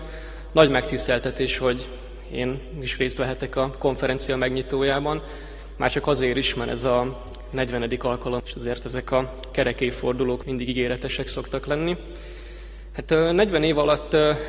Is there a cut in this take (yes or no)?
yes